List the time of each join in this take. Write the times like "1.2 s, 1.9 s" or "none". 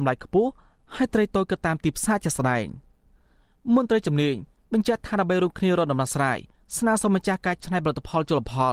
none